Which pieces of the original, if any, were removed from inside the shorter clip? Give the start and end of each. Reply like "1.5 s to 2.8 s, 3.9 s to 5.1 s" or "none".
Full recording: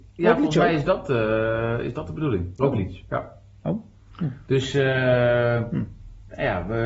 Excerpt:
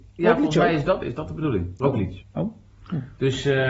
1.0 s to 1.8 s, 3.0 s to 3.5 s